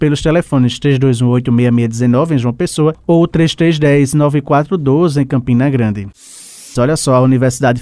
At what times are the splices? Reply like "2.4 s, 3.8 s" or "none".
6.8 s